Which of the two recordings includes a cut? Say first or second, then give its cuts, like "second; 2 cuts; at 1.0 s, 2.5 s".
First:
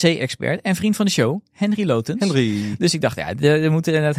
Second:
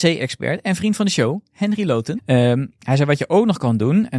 second; 1 cut; at 2.2 s